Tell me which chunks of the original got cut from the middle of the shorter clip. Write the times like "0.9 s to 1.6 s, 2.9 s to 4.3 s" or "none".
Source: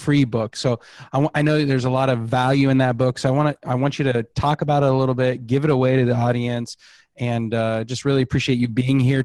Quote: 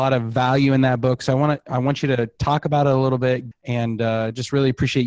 5.5 s to 7.0 s

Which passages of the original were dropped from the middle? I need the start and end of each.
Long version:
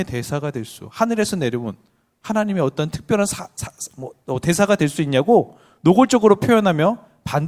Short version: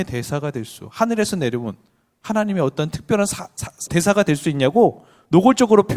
3.9 s to 4.4 s

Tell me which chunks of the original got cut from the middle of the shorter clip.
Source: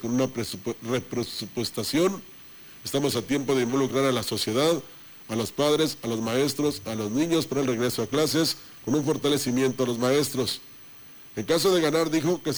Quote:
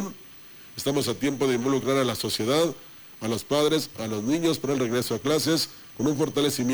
6.0 s to 6.8 s

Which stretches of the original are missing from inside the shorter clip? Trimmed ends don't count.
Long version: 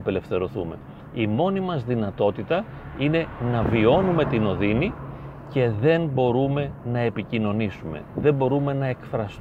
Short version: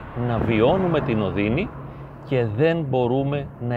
none

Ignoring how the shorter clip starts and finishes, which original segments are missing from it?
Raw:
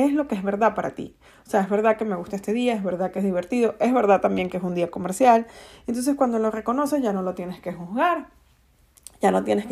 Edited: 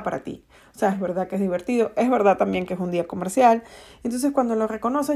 1.6 s to 2.7 s

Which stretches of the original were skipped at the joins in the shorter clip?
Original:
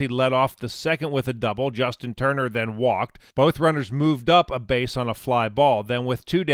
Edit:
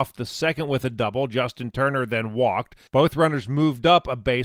none

